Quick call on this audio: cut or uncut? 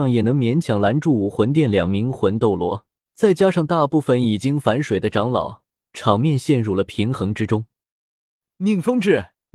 cut